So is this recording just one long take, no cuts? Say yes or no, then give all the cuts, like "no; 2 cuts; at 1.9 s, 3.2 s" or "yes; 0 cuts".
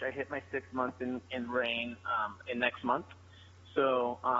yes; 0 cuts